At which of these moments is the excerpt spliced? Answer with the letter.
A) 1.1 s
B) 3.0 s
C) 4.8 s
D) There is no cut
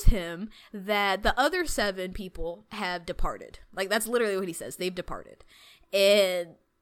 D